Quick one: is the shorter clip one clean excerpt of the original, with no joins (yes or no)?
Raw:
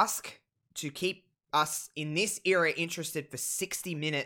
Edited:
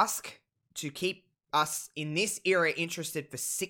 yes